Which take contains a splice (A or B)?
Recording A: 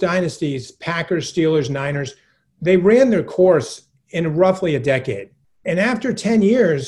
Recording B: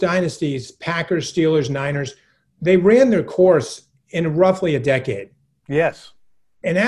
A